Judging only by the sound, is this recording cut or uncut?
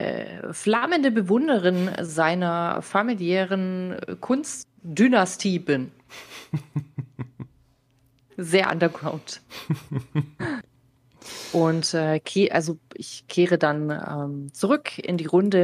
uncut